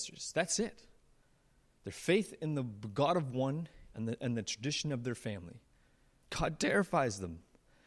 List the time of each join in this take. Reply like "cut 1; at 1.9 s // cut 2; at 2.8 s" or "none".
cut 1; at 6.2 s